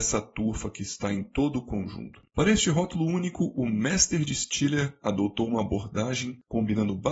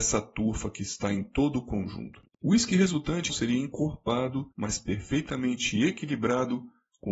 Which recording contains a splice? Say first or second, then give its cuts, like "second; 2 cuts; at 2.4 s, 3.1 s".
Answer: second; 2 cuts; at 2.3 s, 3.3 s